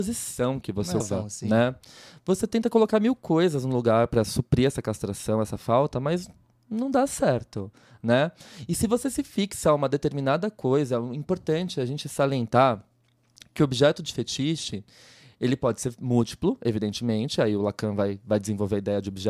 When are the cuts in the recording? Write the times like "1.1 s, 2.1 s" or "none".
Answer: 1.0 s